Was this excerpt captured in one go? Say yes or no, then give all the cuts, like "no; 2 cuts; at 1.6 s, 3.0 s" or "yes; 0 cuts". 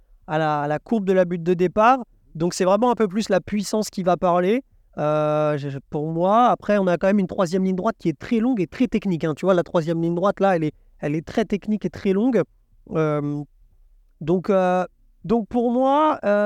yes; 0 cuts